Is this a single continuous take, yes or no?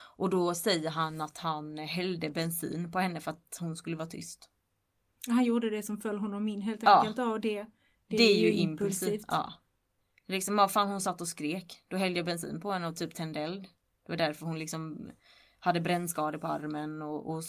yes